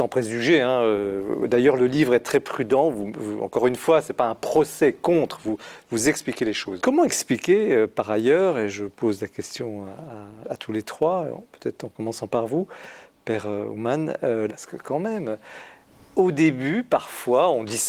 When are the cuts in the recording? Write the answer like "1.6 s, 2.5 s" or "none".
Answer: 6.8 s, 10.4 s, 14.5 s